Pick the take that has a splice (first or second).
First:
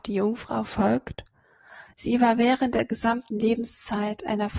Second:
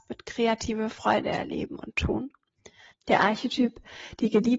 second